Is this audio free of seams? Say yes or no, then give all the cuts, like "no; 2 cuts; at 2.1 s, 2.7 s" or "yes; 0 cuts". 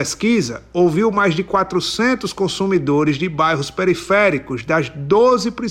yes; 0 cuts